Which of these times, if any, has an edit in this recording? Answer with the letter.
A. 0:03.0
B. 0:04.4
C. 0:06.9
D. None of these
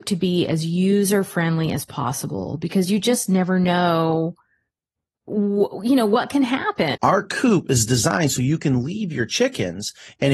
C